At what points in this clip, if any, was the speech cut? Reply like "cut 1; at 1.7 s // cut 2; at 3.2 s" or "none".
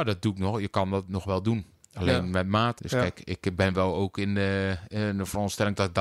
cut 1; at 2.8 s